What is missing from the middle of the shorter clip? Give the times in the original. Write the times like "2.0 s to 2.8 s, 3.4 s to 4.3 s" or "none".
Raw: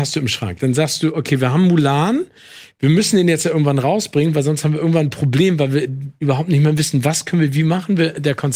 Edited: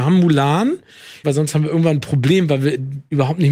2.7 s to 4.3 s